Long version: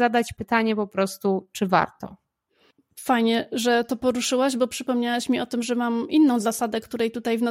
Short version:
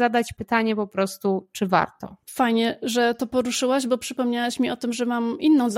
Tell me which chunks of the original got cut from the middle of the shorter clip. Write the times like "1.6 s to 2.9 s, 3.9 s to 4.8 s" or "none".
2.2 s to 2.9 s